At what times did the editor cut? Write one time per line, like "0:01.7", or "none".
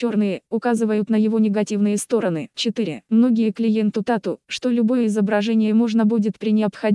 0:03.1
0:04.5